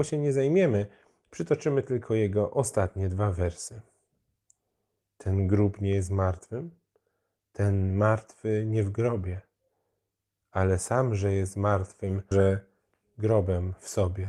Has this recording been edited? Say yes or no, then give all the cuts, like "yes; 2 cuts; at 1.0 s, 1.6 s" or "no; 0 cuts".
yes; 1 cut; at 12.3 s